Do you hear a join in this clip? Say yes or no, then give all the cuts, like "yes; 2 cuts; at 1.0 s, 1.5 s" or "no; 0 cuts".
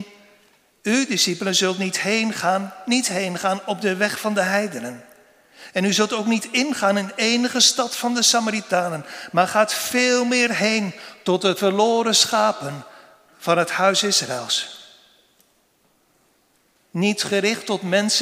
yes; 1 cut; at 16.8 s